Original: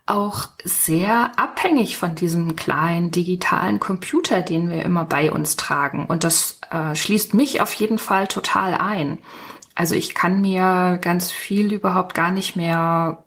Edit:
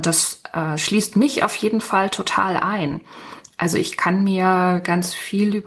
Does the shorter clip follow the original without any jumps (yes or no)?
yes